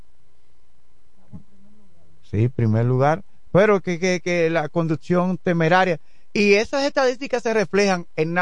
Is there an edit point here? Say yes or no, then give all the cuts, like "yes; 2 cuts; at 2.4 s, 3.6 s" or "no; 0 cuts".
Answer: no; 0 cuts